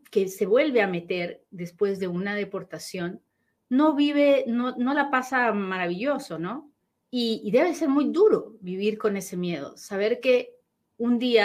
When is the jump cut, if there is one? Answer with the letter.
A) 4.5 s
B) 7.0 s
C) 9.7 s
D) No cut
B